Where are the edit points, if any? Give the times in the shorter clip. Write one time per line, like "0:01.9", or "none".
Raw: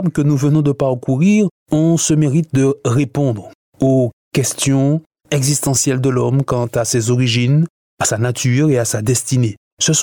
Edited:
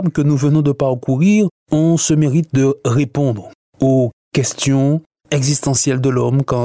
none